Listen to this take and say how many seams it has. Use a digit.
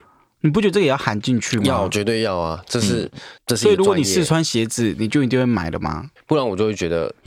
2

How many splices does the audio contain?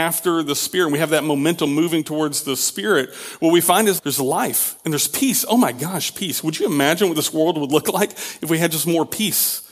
1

